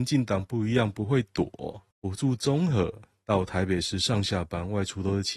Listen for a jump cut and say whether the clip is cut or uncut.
cut